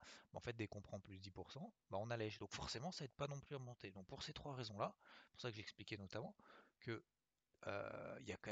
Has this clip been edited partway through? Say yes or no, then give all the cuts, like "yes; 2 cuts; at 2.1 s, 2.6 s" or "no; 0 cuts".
no; 0 cuts